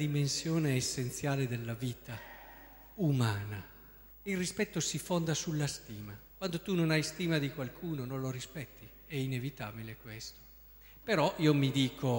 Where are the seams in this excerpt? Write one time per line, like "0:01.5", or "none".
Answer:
0:04.1
0:06.3